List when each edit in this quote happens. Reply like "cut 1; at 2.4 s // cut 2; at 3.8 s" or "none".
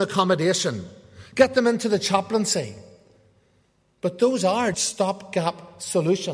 cut 1; at 4.7 s